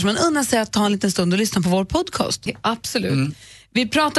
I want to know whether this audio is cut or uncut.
cut